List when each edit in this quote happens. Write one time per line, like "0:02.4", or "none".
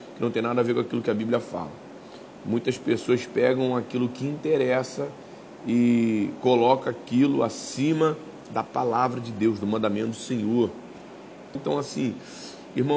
0:02.4
0:11.6